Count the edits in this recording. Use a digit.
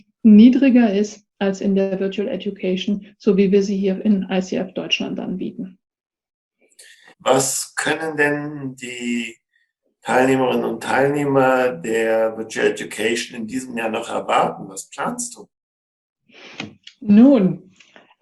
1